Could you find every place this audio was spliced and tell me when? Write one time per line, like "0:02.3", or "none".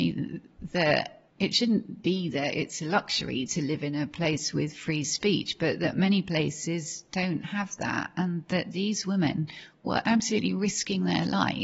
0:01.3